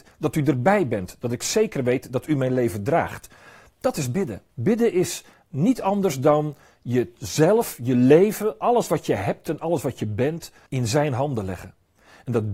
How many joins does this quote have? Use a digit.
2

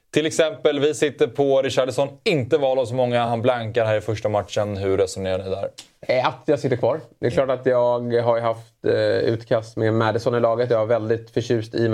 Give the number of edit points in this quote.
0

